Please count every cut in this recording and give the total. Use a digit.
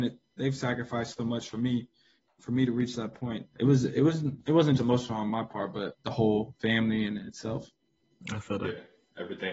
2